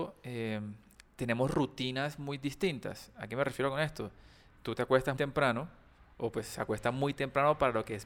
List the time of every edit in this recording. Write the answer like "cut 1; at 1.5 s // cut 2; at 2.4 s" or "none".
cut 1; at 5.2 s